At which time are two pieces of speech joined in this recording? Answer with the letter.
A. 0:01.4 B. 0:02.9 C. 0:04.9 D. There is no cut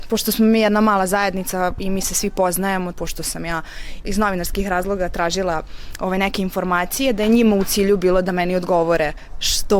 B